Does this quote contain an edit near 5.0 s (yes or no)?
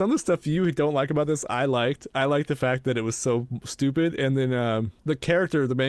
yes